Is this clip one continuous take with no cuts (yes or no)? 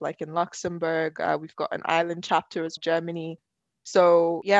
no